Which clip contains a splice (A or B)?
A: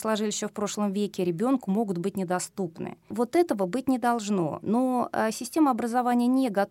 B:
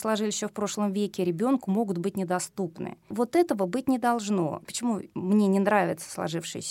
B